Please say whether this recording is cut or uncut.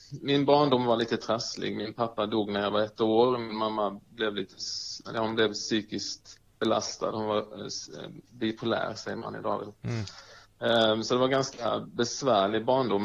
cut